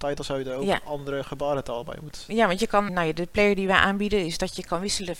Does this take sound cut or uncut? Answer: cut